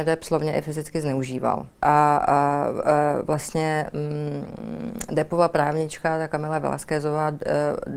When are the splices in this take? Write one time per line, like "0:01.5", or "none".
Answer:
0:01.7

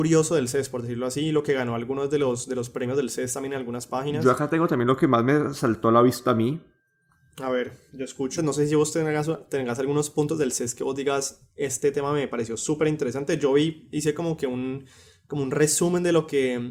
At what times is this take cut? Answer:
0:08.4

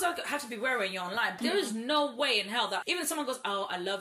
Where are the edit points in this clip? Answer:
0:01.4
0:02.8

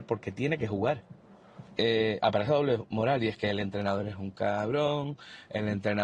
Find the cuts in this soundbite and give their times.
0:01.8

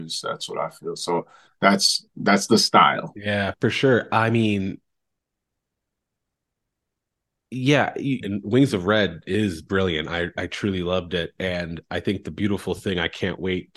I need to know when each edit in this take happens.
0:08.2

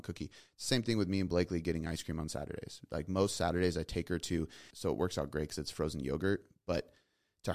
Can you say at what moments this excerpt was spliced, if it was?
0:04.7

